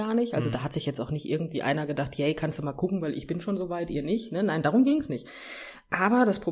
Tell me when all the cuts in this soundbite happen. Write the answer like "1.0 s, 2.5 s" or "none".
none